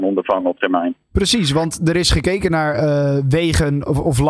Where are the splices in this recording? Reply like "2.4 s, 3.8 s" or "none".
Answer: none